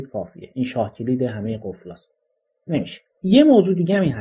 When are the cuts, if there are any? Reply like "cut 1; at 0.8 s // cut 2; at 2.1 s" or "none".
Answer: cut 1; at 3.1 s

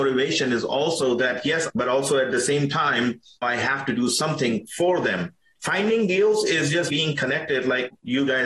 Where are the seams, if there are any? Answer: cut 1; at 1.7 s // cut 2; at 5.6 s // cut 3; at 6.9 s

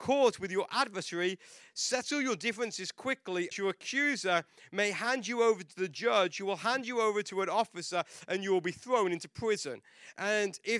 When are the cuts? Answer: cut 1; at 3.5 s

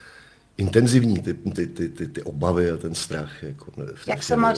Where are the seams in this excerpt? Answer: none

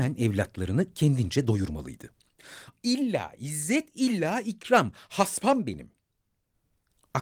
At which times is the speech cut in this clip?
cut 1; at 2.7 s

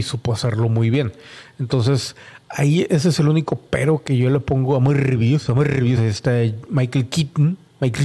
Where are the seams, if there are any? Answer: none

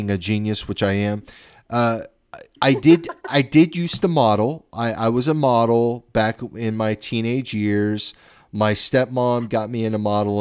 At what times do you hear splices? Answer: none

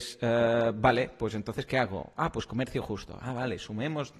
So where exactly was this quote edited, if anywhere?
none

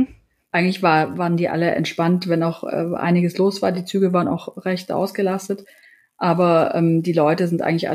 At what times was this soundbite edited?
none

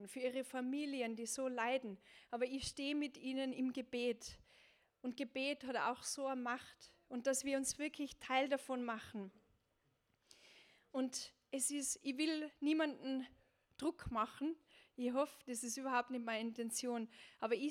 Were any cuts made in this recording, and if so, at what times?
none

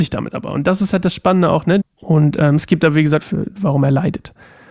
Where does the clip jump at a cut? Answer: cut 1; at 1.8 s // cut 2; at 3.2 s

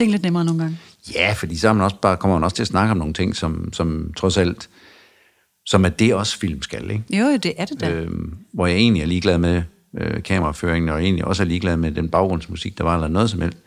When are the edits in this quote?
none

